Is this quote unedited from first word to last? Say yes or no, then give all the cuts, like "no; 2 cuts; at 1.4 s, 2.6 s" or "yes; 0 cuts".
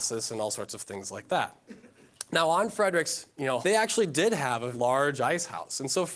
no; 2 cuts; at 3.6 s, 4.7 s